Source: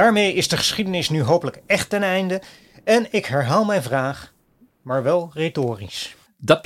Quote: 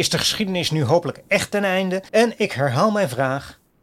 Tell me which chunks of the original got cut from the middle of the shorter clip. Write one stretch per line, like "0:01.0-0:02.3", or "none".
0:02.5-0:02.8